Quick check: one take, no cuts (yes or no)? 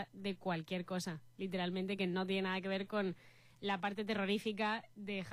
yes